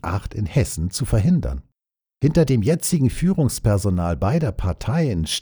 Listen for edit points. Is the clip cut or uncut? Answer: uncut